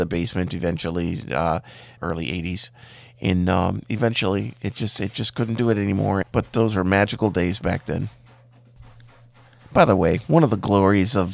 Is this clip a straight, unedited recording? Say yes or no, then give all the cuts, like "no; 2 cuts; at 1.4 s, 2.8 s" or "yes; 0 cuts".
no; 2 cuts; at 2.0 s, 6.2 s